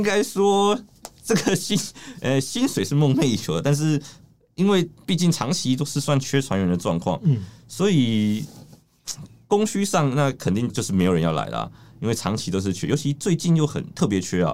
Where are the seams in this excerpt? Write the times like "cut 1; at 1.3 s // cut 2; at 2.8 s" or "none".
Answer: cut 1; at 10.7 s